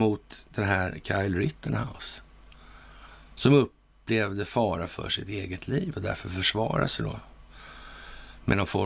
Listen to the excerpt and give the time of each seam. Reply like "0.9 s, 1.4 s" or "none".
none

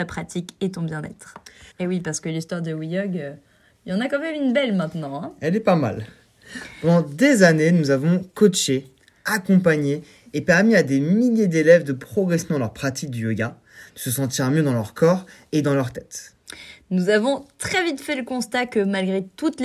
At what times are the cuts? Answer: 1.7 s

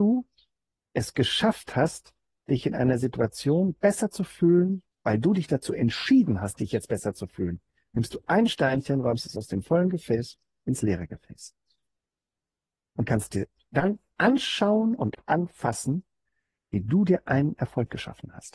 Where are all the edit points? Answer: 4.9 s

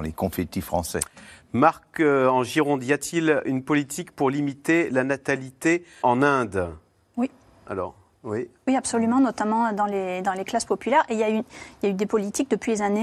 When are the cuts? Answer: 6.0 s

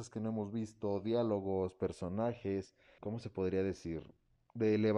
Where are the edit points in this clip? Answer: 3.0 s

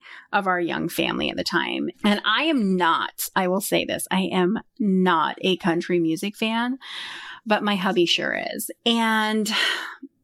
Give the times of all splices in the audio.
1.9 s, 8.8 s

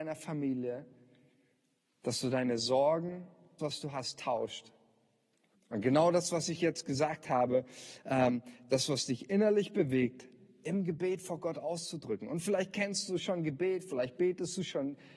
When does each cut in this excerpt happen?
3.6 s, 5.5 s

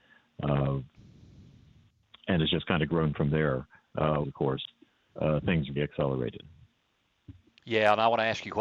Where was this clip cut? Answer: 4.2 s, 5.8 s

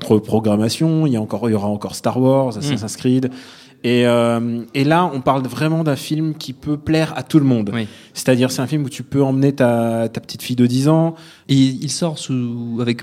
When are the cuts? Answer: 11.4 s

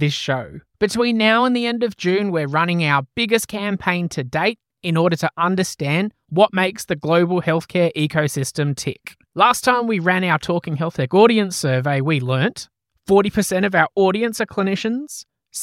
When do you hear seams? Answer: none

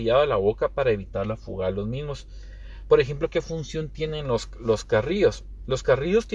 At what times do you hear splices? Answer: none

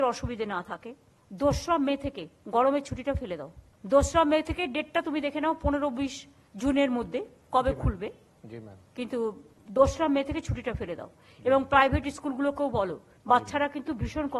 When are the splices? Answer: none

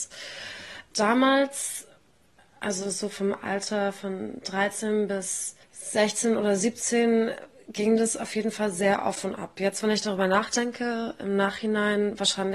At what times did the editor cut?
5.6 s

